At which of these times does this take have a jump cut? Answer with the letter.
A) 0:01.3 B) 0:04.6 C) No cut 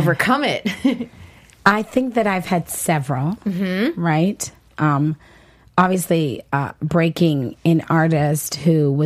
C